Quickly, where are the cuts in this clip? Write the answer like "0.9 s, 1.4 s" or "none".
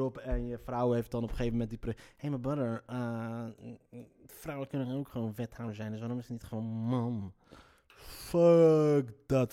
none